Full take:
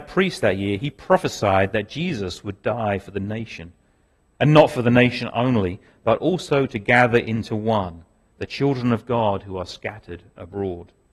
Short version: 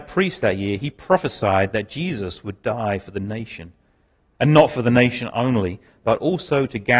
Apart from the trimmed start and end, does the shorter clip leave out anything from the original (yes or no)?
no